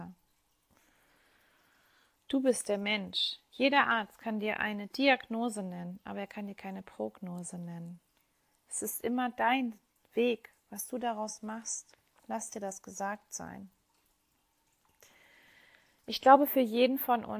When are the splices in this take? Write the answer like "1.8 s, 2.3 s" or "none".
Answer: none